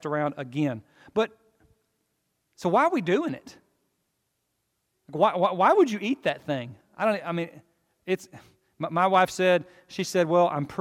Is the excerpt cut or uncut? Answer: uncut